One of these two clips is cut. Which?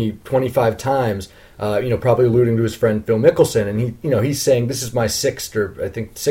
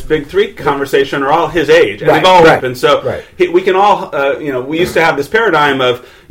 second; 1 cut; at 2.6 s

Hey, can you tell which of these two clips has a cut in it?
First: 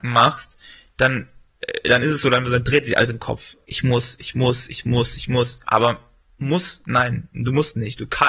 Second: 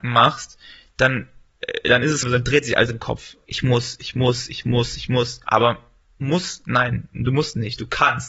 second; 1 cut; at 2.2 s

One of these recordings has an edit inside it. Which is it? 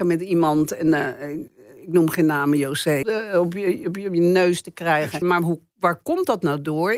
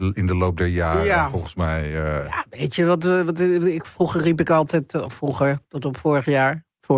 first; 2 cuts; at 3.0 s, 5.2 s

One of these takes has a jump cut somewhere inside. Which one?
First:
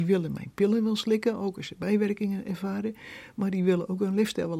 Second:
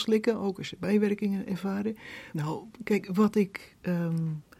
second; 1 cut; at 2.3 s

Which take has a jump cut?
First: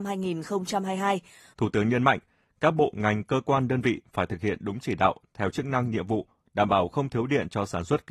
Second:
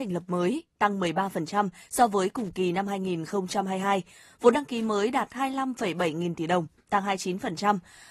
first; 1 cut; at 1.5 s

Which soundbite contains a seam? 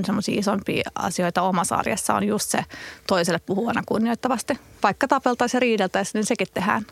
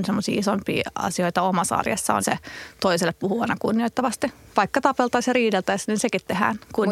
second; 1 cut; at 2.2 s

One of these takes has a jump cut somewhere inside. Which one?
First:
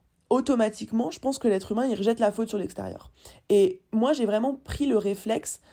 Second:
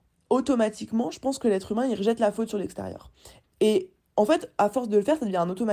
second; 1 cut; at 3.4 s

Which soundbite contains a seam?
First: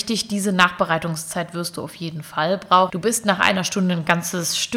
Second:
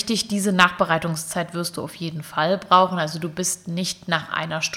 first; 1 cut; at 2.9 s

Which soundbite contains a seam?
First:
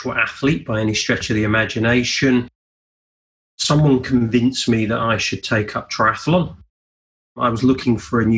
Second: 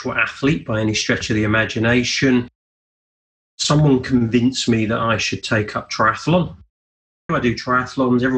second; 1 cut; at 7.3 s

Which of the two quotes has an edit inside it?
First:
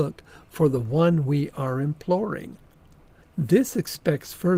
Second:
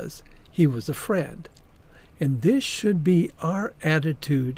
first; 1 cut; at 3.2 s

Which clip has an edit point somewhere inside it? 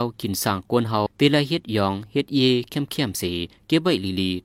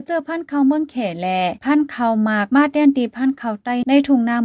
first; 1 cut; at 1.1 s

